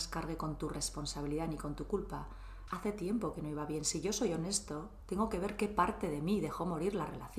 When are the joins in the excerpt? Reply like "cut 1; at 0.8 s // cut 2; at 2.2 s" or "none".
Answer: cut 1; at 2.7 s